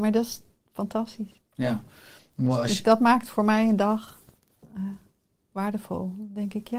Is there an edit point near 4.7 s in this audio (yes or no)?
no